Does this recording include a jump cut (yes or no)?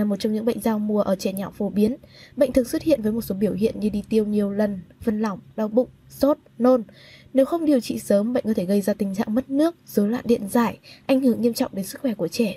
no